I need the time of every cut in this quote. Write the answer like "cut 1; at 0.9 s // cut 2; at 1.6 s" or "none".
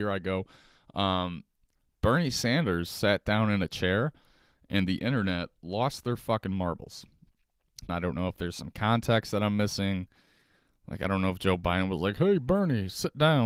cut 1; at 7.9 s